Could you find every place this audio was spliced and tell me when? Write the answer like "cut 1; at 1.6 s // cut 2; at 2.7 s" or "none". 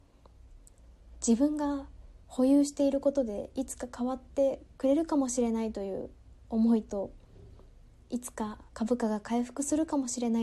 cut 1; at 4.7 s